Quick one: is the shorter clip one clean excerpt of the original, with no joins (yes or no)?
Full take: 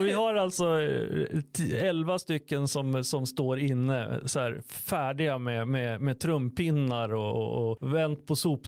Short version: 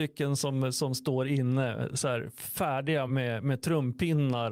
no